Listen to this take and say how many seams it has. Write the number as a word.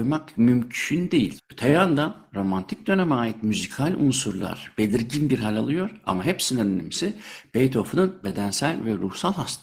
one